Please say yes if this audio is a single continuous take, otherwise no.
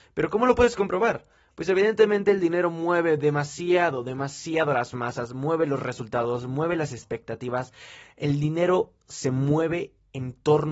yes